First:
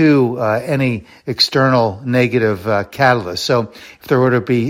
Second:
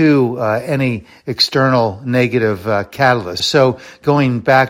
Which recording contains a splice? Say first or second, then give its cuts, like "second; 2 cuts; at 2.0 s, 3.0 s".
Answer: second; 1 cut; at 3.4 s